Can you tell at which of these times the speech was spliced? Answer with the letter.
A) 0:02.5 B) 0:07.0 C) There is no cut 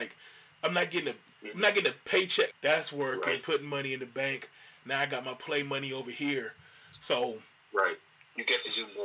A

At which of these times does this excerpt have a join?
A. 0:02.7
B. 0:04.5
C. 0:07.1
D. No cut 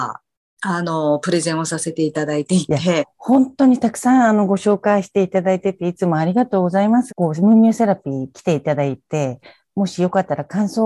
C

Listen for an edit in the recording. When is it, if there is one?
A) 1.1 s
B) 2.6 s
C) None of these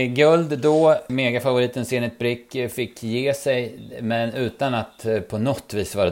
A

